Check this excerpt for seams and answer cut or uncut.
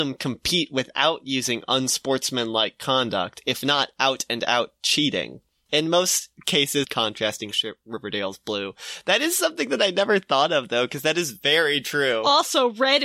cut